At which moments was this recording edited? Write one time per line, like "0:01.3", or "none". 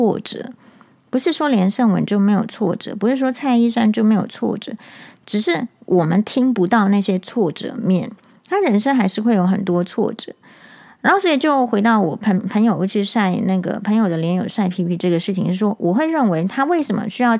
none